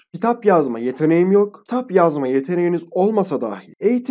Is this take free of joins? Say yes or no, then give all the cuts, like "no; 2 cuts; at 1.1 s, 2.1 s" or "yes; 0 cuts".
no; 1 cut; at 1.6 s